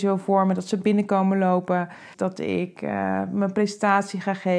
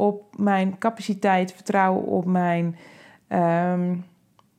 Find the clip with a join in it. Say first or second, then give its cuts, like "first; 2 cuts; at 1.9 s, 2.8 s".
first; 1 cut; at 2.1 s